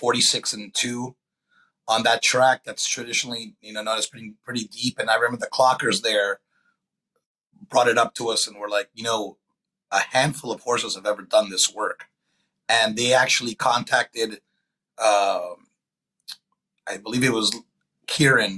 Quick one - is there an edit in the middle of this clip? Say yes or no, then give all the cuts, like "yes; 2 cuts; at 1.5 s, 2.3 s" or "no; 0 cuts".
no; 0 cuts